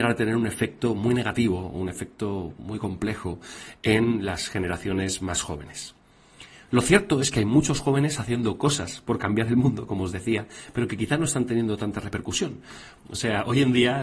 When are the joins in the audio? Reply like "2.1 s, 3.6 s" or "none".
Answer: 13.0 s